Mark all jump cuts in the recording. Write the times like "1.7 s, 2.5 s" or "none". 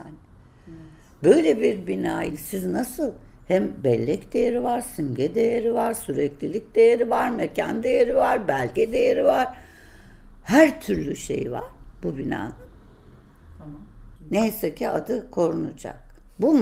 14.2 s